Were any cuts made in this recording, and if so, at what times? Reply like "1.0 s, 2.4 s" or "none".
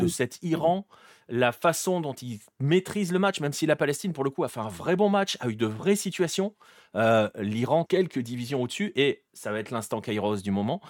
7.9 s, 9.3 s